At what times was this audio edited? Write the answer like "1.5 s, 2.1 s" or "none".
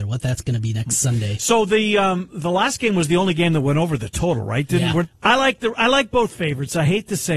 2.3 s, 5.0 s